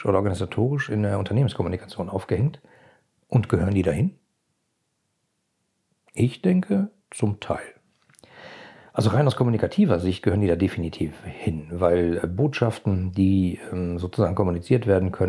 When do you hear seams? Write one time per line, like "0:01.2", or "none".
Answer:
0:07.0